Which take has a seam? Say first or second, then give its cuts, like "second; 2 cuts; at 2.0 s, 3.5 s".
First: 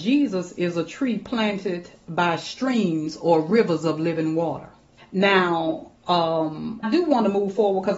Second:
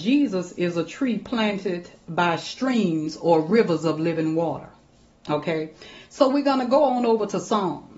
first; 2 cuts; at 5.0 s, 6.8 s